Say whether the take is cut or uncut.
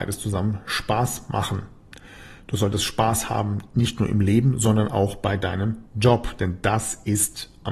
uncut